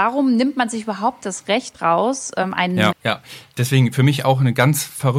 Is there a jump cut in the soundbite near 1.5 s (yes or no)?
no